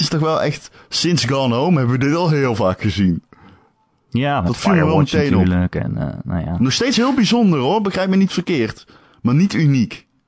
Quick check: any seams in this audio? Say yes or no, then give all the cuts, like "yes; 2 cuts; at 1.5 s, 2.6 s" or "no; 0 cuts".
no; 0 cuts